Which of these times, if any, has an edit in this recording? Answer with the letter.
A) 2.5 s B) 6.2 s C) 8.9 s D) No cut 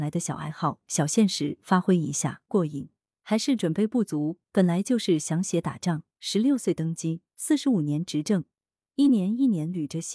A